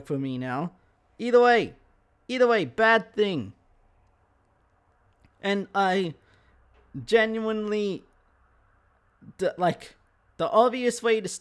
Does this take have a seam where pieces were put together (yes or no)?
no